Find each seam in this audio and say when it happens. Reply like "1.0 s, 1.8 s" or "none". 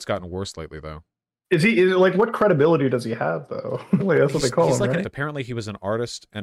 4.0 s, 5.0 s